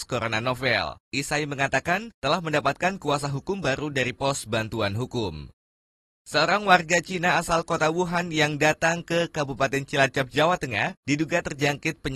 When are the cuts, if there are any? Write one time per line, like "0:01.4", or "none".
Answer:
0:01.0